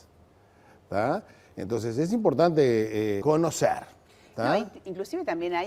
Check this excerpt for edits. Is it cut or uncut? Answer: cut